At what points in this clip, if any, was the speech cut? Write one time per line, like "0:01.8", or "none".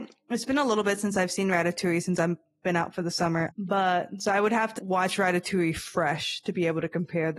0:03.5
0:04.8